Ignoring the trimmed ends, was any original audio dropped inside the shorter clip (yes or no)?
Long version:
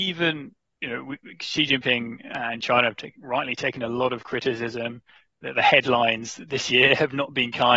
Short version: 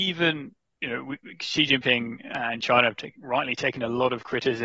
no